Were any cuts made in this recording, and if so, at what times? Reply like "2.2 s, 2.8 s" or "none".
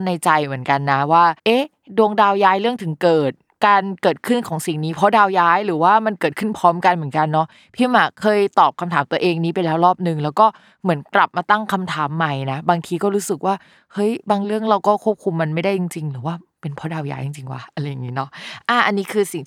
1.4 s

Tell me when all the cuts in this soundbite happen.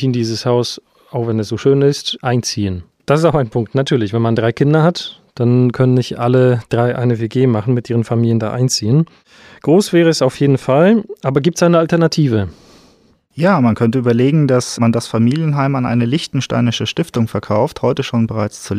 3.0 s

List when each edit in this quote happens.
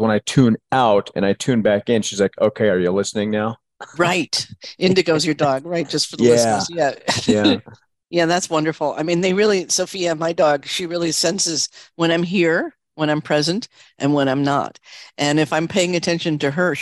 none

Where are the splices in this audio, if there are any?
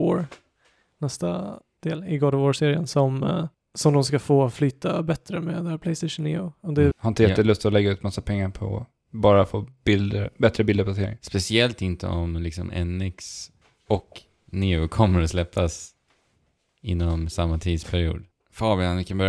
6.9 s, 18.3 s

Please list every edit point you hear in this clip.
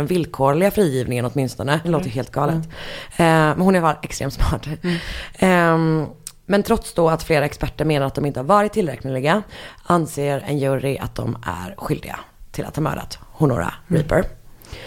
1.8 s

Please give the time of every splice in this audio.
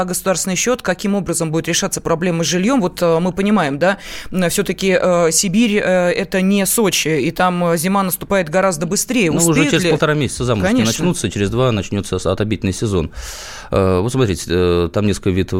none

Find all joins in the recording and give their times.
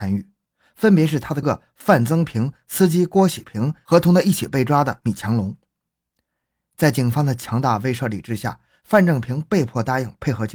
1.4 s

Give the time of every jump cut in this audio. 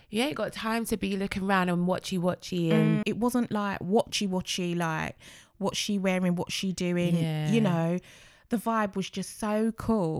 3.0 s

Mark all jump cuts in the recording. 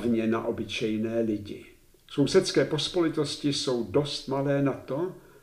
1.9 s

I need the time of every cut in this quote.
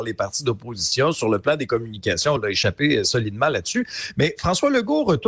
none

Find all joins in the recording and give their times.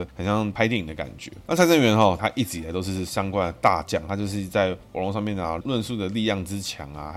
2.2 s

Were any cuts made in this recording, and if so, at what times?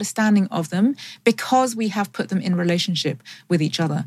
none

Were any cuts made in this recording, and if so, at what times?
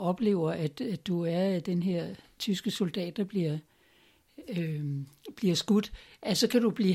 none

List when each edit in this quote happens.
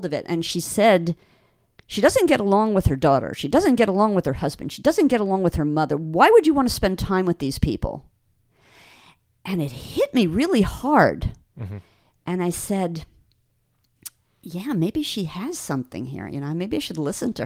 1.8 s

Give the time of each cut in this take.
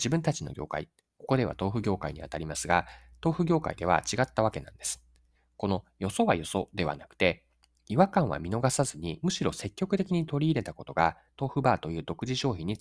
none

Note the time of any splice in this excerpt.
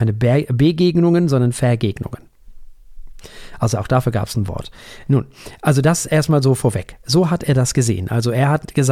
none

